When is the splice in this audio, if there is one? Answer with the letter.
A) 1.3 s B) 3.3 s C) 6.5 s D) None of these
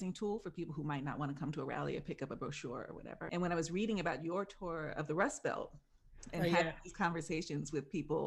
B